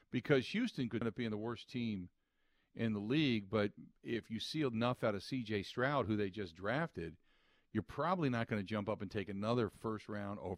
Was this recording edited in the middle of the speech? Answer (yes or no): yes